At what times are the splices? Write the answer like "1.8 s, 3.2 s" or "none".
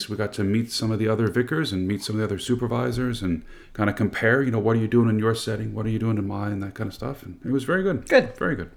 3.6 s